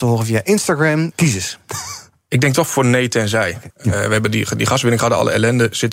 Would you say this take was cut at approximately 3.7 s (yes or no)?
yes